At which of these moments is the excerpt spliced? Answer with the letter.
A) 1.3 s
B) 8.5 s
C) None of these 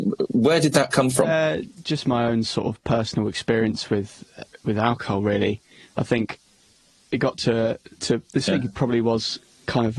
B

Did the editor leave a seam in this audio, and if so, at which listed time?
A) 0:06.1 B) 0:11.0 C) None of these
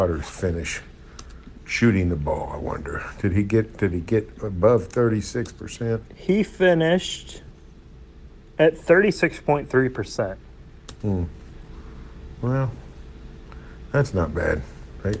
A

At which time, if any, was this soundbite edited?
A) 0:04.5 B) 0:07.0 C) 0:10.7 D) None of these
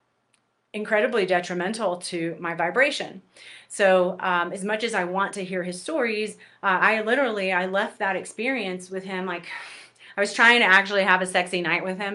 D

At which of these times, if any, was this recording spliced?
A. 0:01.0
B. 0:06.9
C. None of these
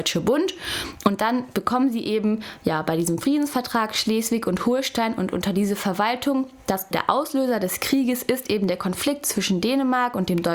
B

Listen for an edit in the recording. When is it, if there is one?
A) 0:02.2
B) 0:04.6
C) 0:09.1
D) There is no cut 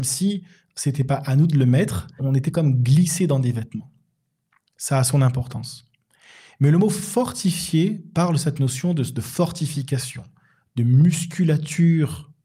A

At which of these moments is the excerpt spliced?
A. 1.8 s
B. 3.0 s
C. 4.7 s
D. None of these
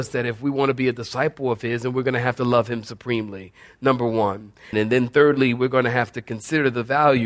C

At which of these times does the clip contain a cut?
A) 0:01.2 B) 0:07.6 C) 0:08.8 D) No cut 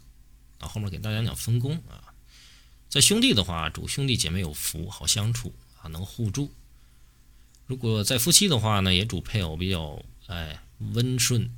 A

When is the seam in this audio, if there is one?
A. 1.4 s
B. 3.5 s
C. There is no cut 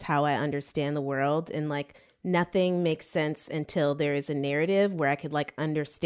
C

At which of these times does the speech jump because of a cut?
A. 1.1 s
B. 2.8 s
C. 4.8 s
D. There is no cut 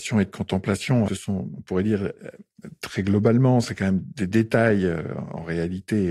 A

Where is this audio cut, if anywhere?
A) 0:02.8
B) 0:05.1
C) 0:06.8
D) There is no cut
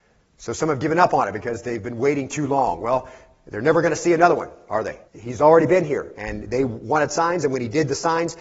B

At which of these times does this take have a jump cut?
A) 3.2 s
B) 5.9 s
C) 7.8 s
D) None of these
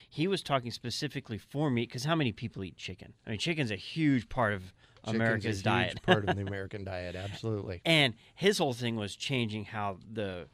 A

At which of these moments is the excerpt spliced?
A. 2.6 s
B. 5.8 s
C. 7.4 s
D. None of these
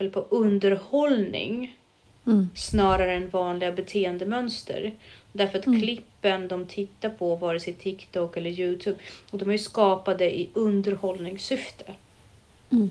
D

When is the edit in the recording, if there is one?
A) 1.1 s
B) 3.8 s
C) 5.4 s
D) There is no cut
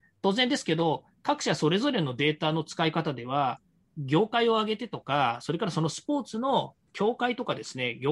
B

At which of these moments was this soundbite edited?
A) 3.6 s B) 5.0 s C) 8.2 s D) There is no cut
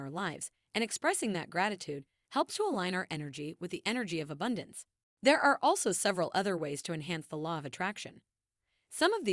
B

